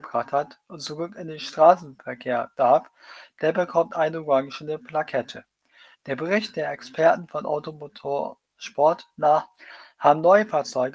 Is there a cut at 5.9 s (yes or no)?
yes